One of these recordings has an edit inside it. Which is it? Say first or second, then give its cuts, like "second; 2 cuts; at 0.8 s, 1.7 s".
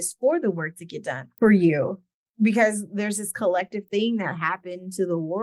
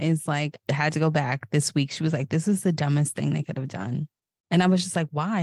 first; 1 cut; at 1.3 s